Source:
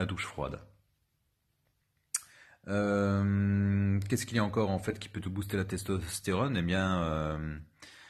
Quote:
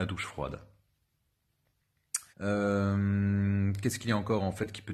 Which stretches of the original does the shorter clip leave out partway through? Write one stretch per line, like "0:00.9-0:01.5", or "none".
0:02.3-0:02.6